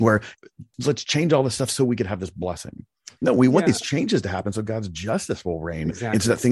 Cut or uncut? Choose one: uncut